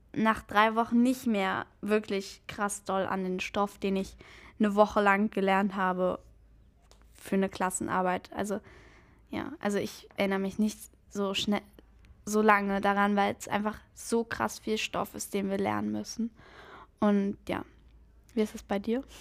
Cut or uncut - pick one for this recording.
uncut